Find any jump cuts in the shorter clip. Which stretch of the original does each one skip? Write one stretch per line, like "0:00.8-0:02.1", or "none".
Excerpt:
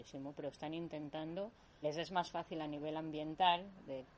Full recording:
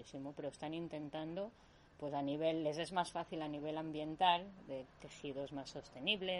0:01.8-0:02.6

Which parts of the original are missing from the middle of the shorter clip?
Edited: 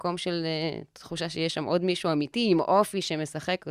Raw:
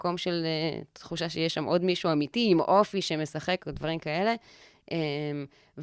none

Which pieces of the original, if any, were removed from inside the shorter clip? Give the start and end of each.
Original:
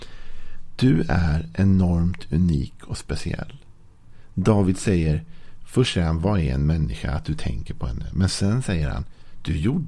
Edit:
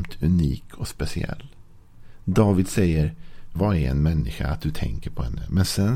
0:05.6-0:06.2

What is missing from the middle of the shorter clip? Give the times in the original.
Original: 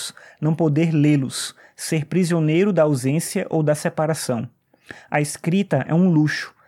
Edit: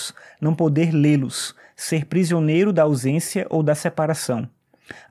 none

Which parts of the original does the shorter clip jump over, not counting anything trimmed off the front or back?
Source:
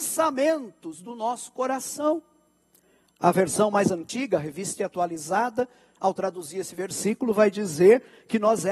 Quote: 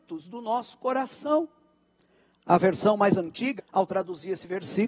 0:04.3-0:05.8

